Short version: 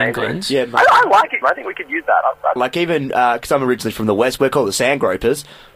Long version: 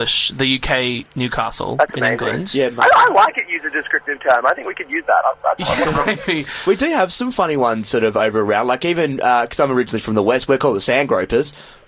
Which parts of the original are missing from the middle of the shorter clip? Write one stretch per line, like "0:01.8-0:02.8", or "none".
0:03.5-0:04.4
0:05.6-0:08.6

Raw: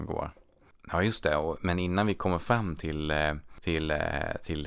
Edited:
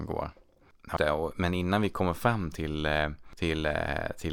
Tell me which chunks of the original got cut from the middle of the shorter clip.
0:01.0-0:01.2

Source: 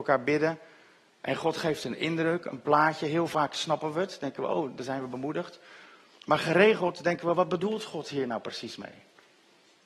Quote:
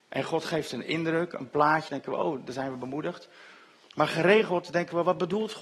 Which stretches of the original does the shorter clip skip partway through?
0:03.0-0:04.2

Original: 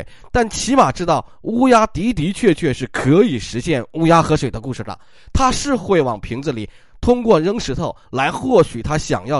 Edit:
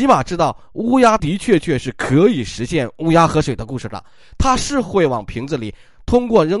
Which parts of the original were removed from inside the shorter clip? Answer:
0:01.9-0:02.1

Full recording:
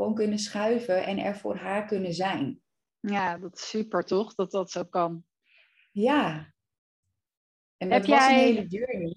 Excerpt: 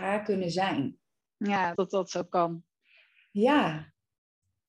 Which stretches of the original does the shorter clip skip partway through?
0:03.4-0:04.4

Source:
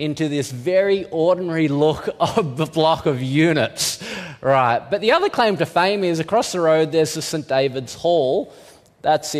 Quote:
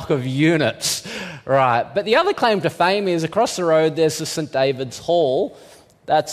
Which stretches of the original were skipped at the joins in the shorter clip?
none

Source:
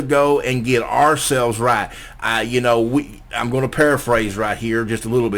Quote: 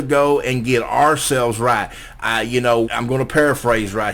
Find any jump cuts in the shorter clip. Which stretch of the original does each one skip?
0:02.8-0:03.3

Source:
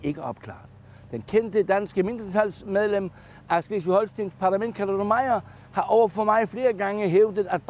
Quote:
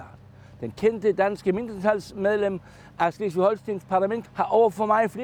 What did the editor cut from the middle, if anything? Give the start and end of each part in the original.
0:04.7-0:05.6

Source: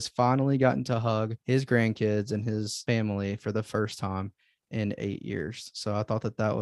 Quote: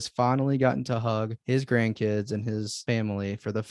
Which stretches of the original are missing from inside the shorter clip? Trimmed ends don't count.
none

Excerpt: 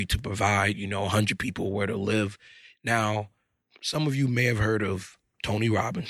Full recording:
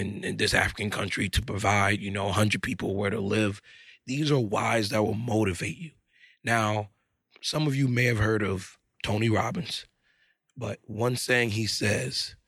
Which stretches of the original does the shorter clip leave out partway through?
0:04.0-0:06.3

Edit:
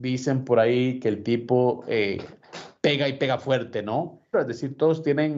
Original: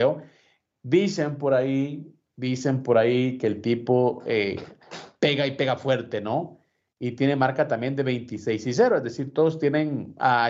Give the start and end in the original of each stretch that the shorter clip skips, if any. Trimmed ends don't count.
0:06.7-0:08.9

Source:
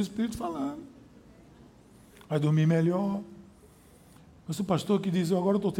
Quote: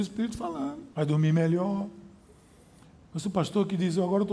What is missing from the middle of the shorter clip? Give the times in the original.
0:00.9-0:02.3

